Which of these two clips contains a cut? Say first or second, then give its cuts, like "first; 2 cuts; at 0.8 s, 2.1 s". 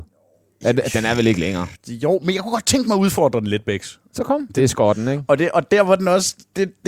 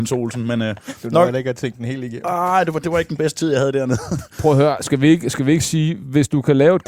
first; 1 cut; at 4.5 s